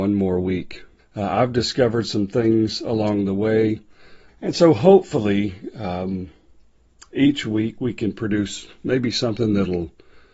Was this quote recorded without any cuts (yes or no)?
no